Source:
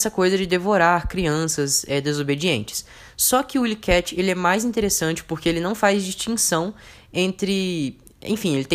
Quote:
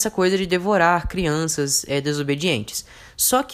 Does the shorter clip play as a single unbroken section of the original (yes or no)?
yes